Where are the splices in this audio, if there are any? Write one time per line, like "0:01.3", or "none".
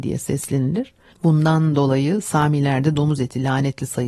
0:01.1